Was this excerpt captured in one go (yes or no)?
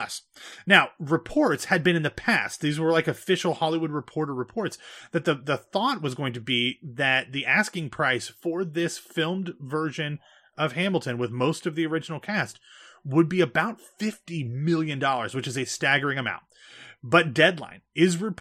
yes